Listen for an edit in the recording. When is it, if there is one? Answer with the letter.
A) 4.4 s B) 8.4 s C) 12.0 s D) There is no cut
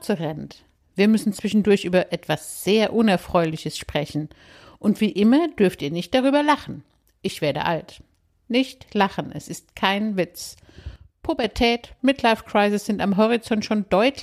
C